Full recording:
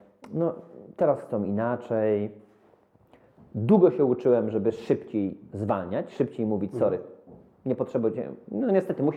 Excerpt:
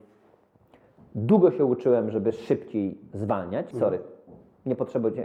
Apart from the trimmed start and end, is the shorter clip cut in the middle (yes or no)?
yes